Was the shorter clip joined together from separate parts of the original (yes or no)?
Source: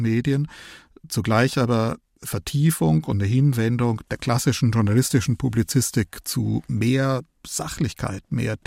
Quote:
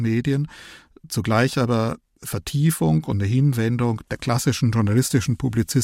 no